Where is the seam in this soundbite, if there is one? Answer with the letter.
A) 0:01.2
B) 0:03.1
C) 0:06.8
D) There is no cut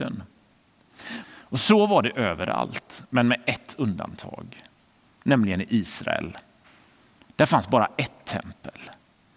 A